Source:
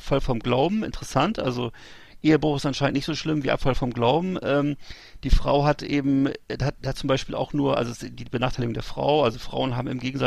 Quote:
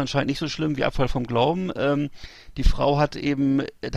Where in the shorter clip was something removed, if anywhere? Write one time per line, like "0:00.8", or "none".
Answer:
none